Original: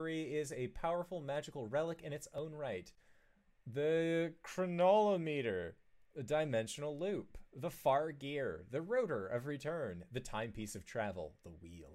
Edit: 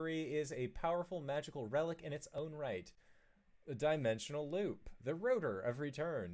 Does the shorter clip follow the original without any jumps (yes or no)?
no